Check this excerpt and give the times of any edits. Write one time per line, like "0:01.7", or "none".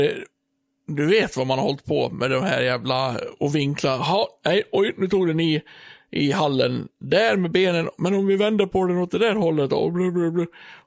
none